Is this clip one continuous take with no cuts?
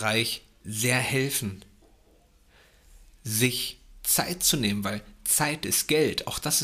yes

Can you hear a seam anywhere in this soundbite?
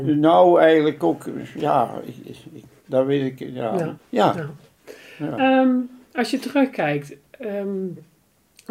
yes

